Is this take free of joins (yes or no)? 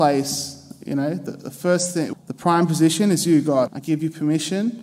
no